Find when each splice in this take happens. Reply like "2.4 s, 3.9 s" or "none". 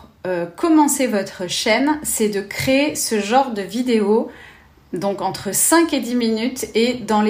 none